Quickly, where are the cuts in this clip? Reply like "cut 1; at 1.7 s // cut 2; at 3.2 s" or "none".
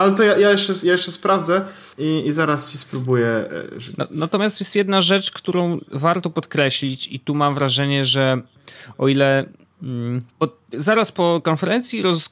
cut 1; at 1.9 s // cut 2; at 10.3 s